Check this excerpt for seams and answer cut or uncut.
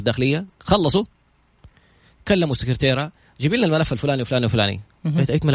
uncut